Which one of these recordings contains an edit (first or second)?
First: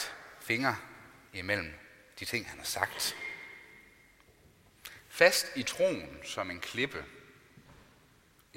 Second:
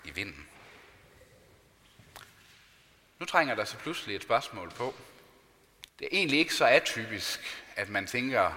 second